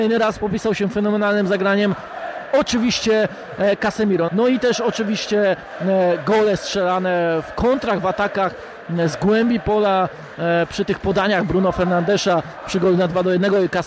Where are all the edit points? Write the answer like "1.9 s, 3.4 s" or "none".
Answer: 4.3 s